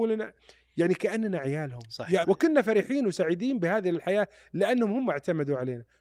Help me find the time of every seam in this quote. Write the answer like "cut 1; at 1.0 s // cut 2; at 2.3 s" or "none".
cut 1; at 2.2 s